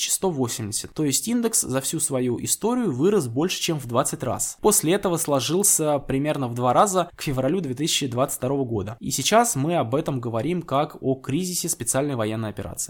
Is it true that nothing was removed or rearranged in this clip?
no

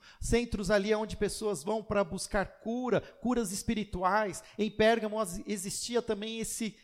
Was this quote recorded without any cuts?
yes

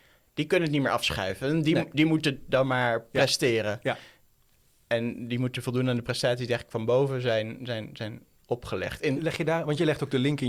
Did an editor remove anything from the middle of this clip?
yes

